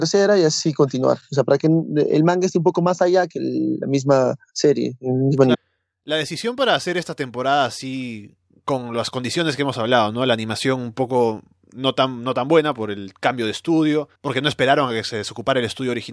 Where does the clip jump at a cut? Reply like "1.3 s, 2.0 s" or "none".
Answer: 5.5 s, 14.2 s